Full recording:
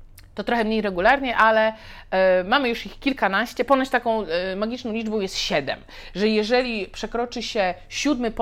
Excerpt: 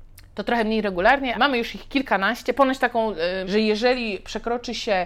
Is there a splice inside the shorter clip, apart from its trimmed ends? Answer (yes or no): yes